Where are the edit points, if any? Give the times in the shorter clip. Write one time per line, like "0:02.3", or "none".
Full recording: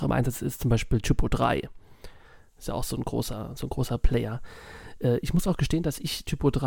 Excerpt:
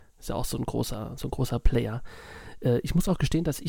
none

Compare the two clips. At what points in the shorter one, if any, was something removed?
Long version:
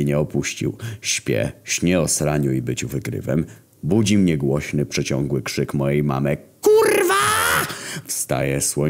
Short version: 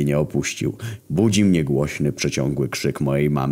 0:01.0

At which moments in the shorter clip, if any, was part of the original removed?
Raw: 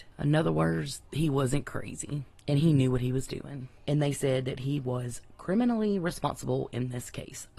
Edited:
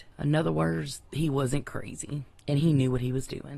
none

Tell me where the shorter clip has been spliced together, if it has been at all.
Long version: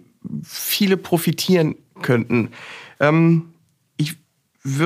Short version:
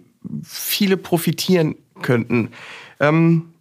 none

